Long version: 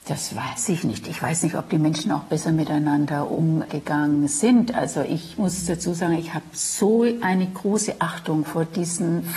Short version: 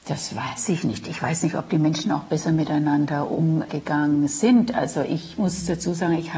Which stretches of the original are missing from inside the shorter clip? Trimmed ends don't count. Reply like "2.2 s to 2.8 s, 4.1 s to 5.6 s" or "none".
none